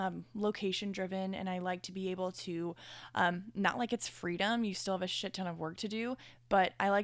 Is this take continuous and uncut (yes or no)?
yes